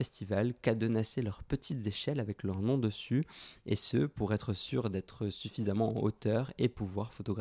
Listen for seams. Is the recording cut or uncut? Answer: uncut